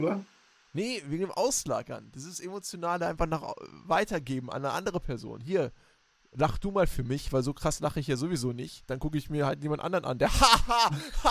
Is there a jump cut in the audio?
no; 0 cuts

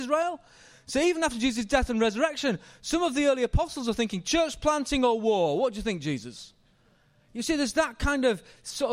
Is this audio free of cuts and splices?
yes; 0 cuts

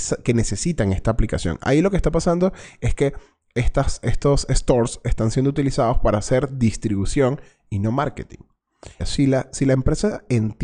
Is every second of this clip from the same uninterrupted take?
no; 1 cut; at 9.0 s

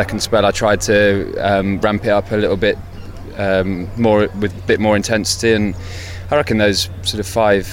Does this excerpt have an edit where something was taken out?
no; 0 cuts

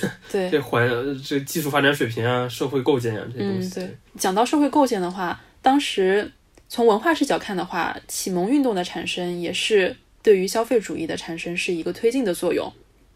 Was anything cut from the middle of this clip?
no; 0 cuts

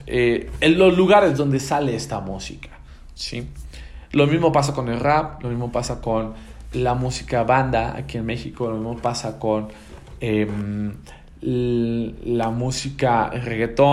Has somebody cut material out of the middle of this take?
no; 0 cuts

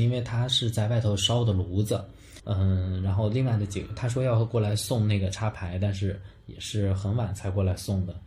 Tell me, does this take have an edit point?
yes; 1 cut; at 2.4 s

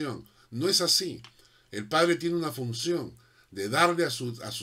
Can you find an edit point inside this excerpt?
no; 0 cuts

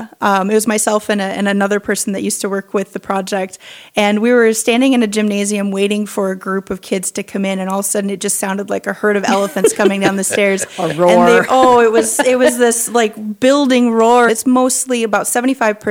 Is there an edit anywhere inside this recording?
yes; 1 cut; at 14.3 s

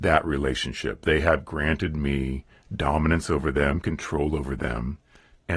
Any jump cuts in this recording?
no; 0 cuts

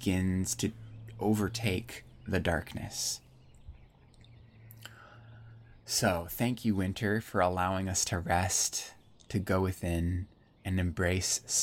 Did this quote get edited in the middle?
no; 0 cuts

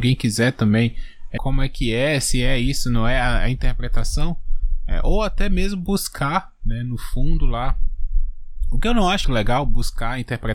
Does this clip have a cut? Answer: yes; 2 cuts; at 1.4 s, 9.2 s

